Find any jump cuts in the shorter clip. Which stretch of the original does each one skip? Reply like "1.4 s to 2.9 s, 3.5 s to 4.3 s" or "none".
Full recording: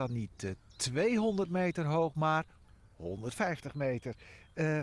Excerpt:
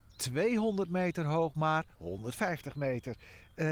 2.5 s to 2.9 s